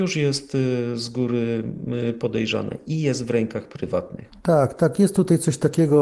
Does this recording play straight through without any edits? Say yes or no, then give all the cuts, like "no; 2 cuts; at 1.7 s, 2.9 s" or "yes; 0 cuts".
yes; 0 cuts